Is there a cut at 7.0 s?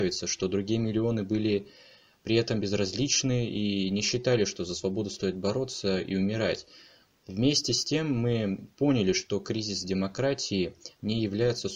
no; 0 cuts

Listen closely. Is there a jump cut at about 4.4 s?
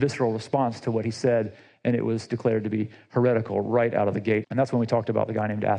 yes; 1 cut; at 4.4 s

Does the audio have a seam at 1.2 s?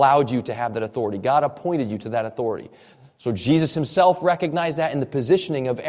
no; 0 cuts

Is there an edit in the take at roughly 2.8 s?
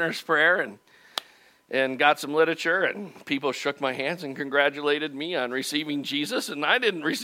no; 0 cuts

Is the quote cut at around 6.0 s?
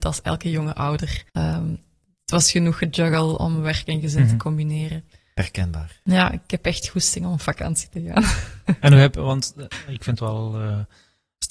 no; 1 cut; at 1.3 s

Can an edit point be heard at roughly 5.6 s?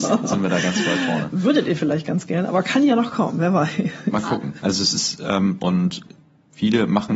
yes; 2 cuts; at 4.6 s, 5.6 s

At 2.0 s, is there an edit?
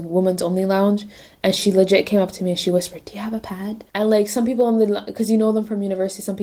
no; 1 cut; at 3.9 s

